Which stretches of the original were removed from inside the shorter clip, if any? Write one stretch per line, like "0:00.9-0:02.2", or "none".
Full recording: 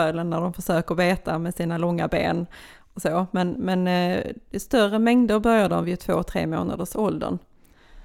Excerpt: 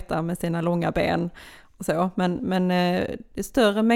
none